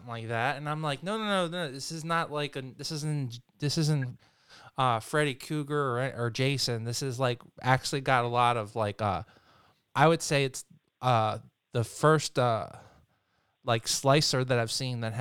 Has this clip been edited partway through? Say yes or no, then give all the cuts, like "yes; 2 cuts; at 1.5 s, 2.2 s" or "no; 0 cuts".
yes; 1 cut; at 9.9 s